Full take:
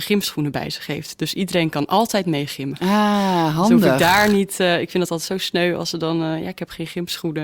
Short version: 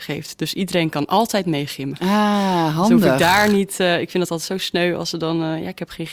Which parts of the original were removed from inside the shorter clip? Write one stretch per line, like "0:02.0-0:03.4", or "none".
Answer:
none